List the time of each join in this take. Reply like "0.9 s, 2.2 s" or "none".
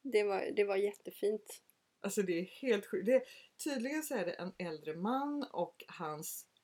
none